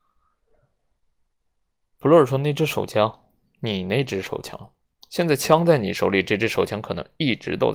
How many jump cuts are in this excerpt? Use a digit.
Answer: 0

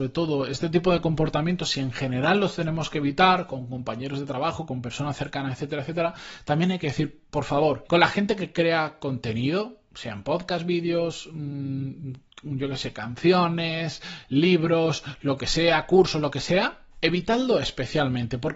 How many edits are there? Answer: 2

